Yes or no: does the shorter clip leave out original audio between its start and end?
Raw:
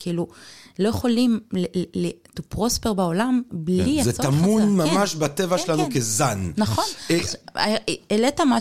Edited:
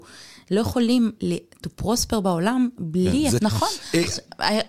yes